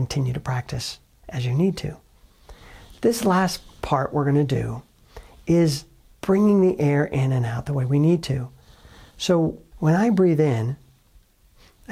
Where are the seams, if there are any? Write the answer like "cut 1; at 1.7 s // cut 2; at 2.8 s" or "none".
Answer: cut 1; at 9.7 s